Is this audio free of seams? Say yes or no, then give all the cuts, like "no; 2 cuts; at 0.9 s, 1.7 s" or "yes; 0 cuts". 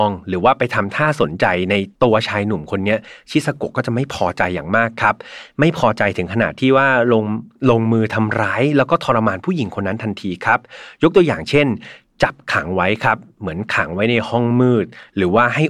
no; 1 cut; at 1.9 s